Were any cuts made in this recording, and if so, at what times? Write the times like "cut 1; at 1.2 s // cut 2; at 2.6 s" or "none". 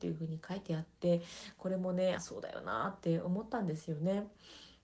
cut 1; at 2.2 s